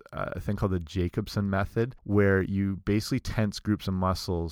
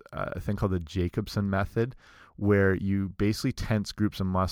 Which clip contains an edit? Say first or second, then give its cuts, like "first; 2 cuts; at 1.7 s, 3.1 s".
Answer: first; 1 cut; at 2.0 s